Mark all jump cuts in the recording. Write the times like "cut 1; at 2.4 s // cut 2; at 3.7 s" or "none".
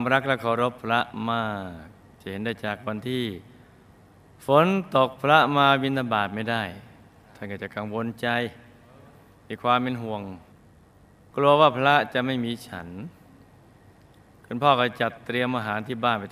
none